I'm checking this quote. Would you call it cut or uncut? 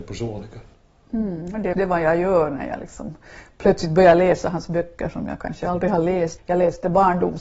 cut